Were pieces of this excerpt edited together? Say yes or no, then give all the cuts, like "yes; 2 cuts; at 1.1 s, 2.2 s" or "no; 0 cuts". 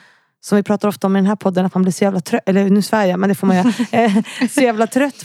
no; 0 cuts